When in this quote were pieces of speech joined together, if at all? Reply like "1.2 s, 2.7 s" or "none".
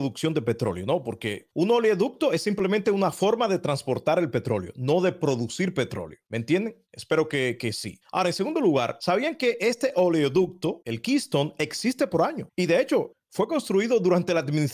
none